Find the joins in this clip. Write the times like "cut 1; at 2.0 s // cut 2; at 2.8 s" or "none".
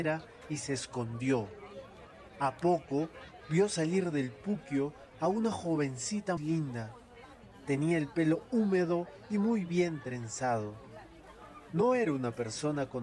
cut 1; at 6.4 s

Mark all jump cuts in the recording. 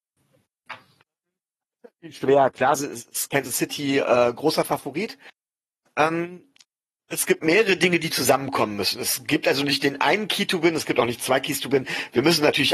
none

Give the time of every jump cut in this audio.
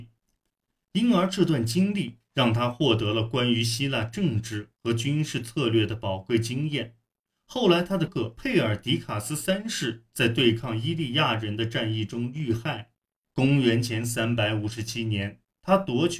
cut 1; at 8.1 s // cut 2; at 13.2 s

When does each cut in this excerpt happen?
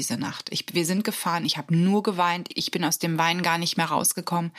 cut 1; at 2.5 s

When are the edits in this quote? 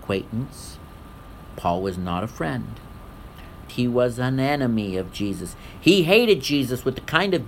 cut 1; at 3.7 s

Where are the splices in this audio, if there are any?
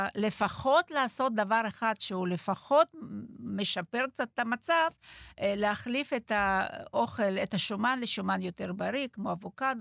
none

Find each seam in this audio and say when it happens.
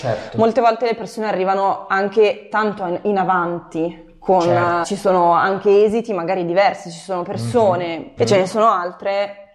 cut 1; at 4.8 s // cut 2; at 8.2 s

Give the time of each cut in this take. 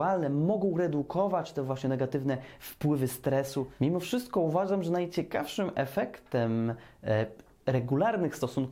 none

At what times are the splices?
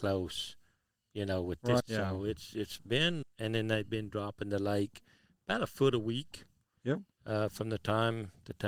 cut 1; at 1.8 s // cut 2; at 3.2 s

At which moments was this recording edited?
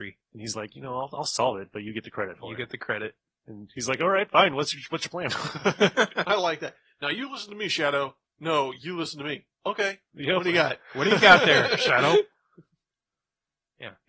none

